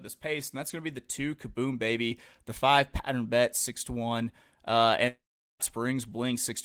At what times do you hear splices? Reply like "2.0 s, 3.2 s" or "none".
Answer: none